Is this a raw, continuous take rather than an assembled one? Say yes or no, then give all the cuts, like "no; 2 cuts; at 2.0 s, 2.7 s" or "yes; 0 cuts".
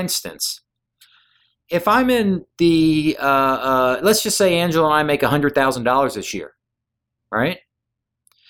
yes; 0 cuts